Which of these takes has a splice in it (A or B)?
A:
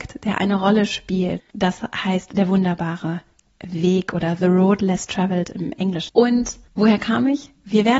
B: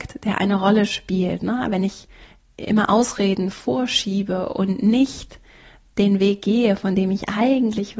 A